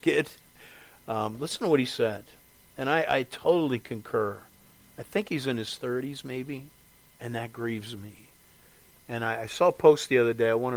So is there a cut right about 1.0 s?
no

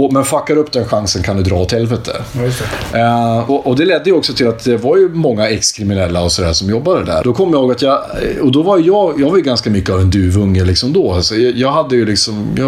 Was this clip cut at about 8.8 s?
no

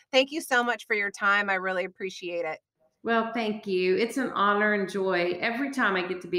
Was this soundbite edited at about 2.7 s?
no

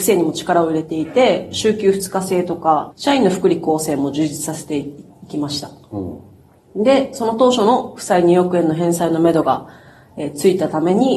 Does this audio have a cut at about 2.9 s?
yes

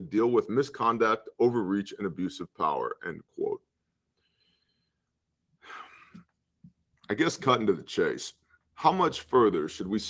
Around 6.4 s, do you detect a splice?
no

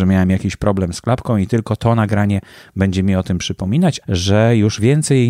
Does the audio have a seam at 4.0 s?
yes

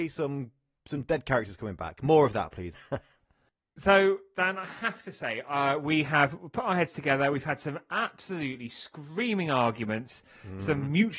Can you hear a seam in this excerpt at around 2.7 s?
yes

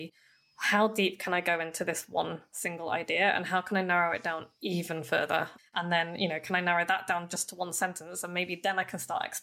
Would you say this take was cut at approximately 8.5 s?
no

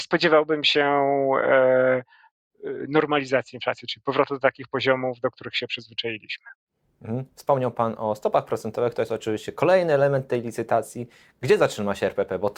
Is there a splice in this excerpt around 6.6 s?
no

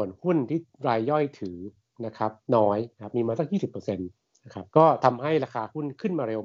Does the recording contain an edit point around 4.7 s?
yes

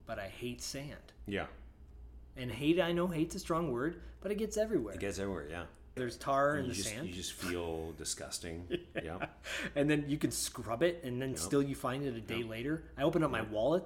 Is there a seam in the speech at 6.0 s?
yes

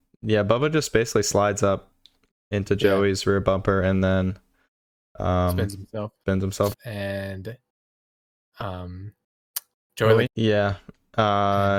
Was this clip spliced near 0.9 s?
no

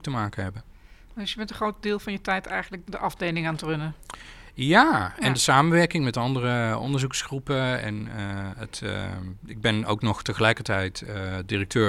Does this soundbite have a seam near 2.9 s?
yes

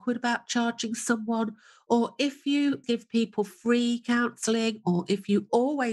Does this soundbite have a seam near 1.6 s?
no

